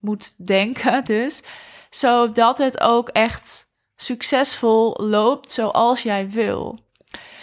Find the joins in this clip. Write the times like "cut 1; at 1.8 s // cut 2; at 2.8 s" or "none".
none